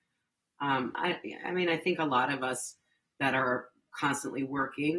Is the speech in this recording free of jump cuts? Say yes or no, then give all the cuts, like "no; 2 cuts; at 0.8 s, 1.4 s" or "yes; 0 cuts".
yes; 0 cuts